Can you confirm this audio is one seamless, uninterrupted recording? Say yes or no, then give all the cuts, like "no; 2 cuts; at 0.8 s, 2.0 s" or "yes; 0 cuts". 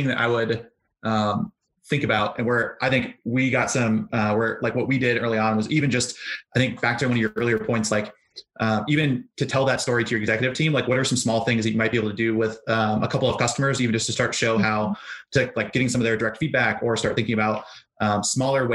no; 1 cut; at 15.5 s